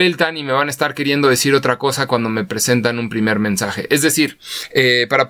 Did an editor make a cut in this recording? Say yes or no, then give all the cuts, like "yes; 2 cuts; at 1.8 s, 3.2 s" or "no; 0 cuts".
no; 0 cuts